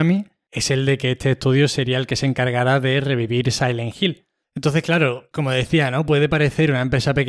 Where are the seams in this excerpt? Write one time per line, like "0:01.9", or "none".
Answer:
0:04.4